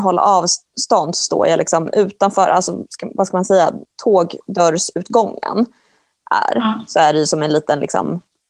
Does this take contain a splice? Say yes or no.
no